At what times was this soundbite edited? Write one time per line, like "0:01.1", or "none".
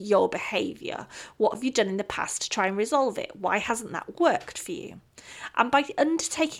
none